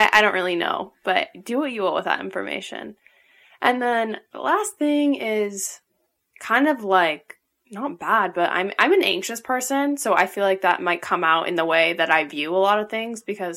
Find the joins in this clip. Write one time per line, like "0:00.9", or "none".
none